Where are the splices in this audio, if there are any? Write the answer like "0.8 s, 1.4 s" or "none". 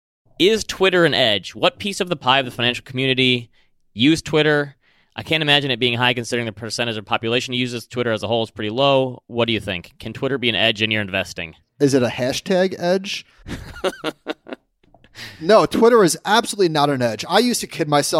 none